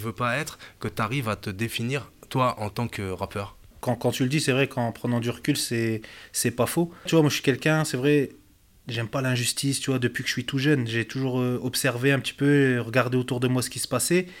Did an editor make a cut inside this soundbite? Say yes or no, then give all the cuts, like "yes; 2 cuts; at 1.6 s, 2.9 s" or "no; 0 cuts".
yes; 1 cut; at 3.7 s